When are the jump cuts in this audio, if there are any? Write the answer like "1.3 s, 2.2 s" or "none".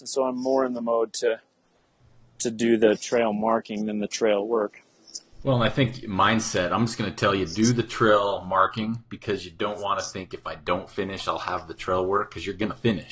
none